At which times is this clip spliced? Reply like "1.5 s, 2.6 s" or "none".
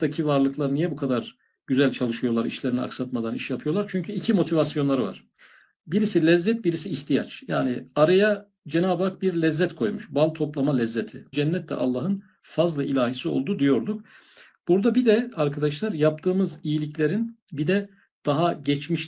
11.3 s, 17.4 s